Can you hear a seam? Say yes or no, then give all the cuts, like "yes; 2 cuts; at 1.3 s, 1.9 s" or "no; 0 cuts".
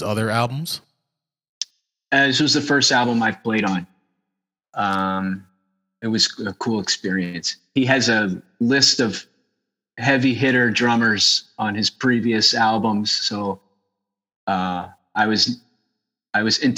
yes; 1 cut; at 4.6 s